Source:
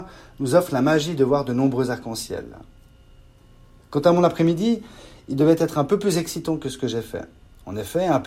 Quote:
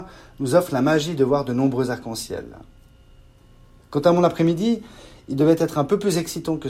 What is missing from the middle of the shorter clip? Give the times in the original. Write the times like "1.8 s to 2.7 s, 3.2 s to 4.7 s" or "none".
none